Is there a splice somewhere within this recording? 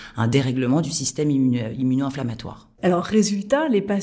yes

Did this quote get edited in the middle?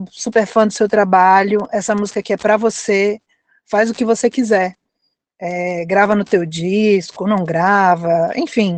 no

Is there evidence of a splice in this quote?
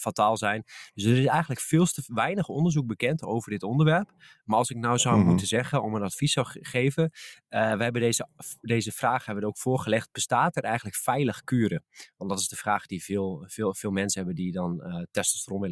no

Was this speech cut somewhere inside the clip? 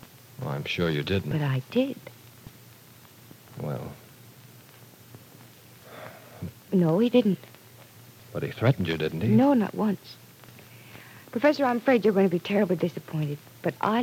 yes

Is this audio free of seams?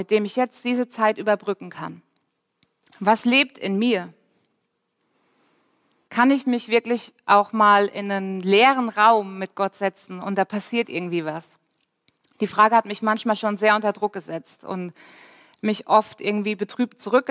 no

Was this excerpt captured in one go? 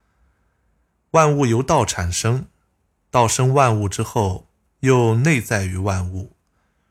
yes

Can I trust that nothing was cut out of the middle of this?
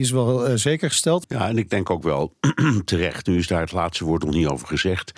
no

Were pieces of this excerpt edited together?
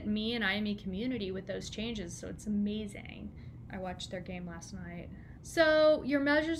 yes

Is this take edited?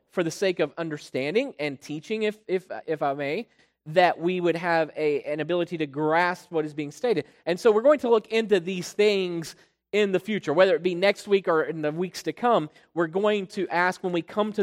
no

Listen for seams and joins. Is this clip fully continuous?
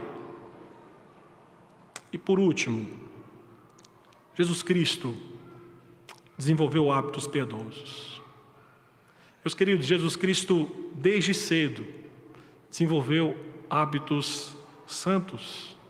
yes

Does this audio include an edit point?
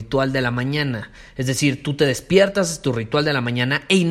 no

